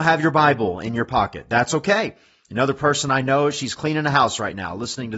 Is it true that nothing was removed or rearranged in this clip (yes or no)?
yes